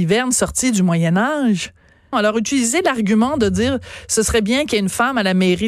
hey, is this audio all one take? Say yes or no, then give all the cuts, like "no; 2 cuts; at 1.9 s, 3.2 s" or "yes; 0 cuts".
no; 1 cut; at 2.1 s